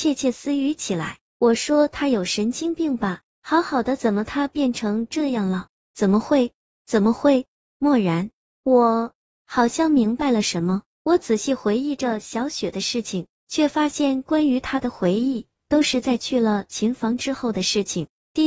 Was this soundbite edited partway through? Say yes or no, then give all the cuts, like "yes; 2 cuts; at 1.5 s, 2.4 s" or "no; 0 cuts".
no; 0 cuts